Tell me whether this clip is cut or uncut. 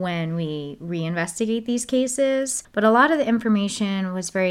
cut